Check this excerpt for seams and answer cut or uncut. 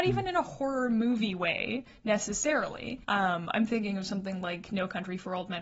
cut